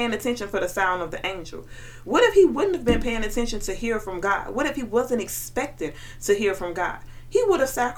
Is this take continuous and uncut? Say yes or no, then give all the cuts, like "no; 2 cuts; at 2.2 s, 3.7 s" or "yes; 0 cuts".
yes; 0 cuts